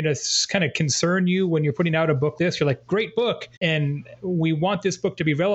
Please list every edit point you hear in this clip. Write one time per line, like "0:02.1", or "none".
0:02.4
0:03.6

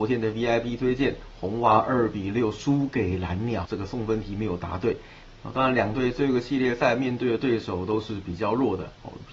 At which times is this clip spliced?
0:03.7
0:05.4

